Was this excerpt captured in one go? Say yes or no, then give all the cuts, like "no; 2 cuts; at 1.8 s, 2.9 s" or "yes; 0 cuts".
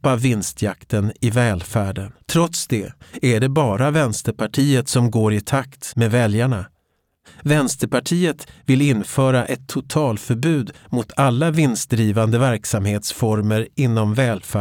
no; 1 cut; at 2.2 s